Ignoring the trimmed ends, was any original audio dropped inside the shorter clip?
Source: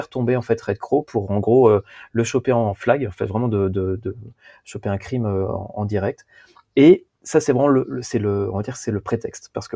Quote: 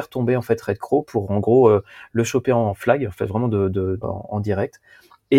yes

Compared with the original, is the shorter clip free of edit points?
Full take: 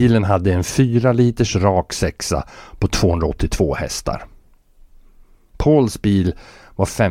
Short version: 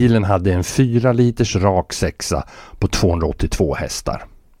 yes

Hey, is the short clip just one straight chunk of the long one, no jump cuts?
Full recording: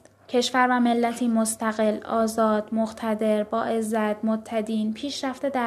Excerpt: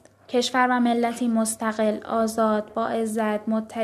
no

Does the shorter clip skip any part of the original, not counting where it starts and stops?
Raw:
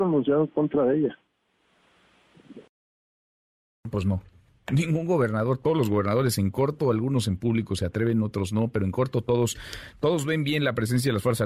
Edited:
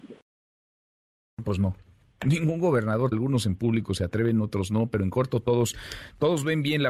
yes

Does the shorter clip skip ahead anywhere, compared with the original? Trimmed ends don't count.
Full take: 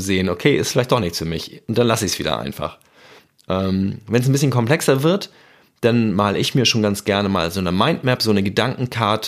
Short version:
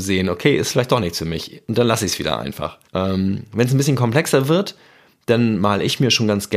yes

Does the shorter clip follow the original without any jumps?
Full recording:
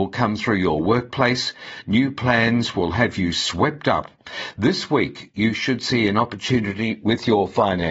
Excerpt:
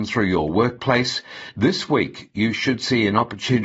no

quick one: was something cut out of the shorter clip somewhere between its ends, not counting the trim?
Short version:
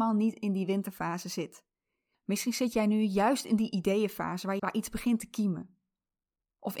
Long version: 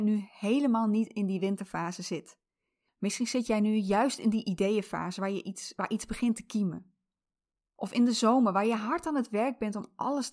yes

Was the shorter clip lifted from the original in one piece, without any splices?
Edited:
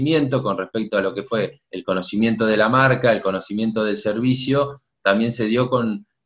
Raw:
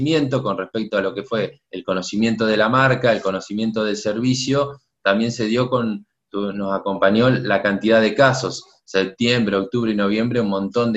yes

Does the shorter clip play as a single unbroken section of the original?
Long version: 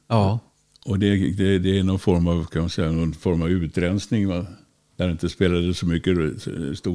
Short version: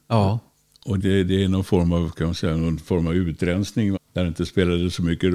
no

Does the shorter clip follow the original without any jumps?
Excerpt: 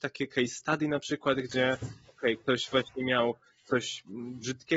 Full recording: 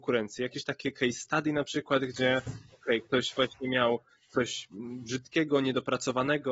yes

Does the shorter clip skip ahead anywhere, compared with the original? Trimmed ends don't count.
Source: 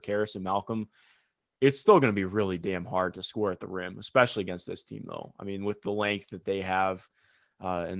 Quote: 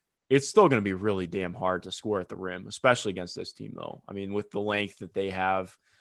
no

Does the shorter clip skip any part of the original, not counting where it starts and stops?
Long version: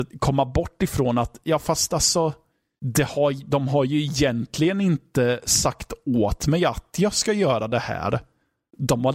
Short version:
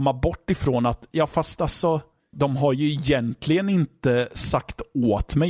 yes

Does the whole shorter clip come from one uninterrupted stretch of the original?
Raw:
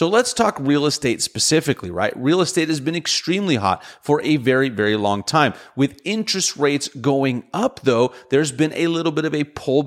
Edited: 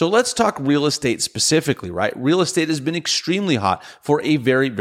yes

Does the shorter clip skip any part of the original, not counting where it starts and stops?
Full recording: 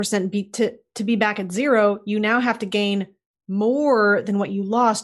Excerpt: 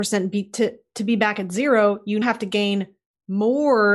yes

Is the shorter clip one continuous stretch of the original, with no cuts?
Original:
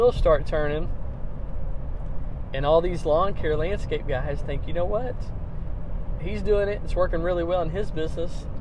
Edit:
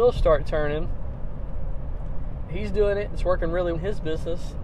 no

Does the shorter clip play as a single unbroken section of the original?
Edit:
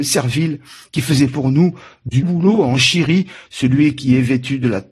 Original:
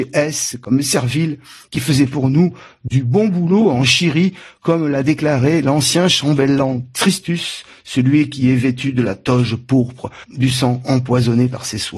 no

